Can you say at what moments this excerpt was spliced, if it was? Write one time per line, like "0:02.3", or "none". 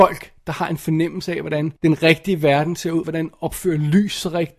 0:01.8
0:03.0

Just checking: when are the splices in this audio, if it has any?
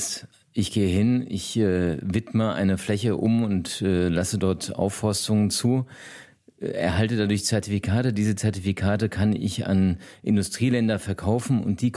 none

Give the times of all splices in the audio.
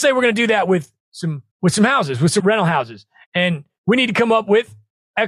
0:02.4

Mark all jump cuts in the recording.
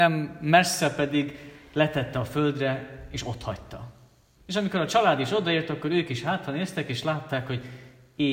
0:04.4

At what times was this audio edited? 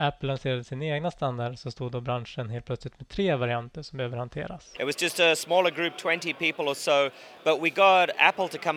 0:04.8

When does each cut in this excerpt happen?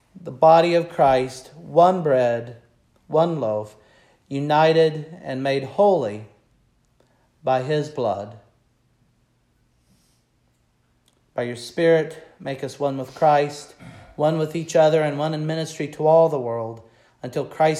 none

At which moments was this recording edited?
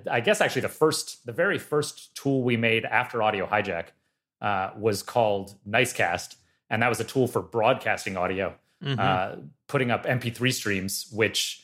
none

